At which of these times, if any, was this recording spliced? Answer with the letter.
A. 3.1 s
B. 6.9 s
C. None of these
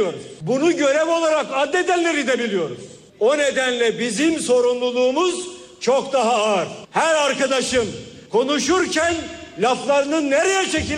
C